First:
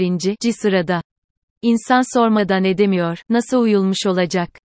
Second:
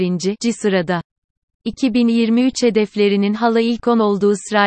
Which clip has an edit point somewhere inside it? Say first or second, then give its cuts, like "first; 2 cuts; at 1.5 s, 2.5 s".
first; 2 cuts; at 1.5 s, 3.2 s